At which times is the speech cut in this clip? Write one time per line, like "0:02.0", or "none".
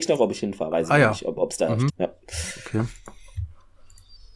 0:01.9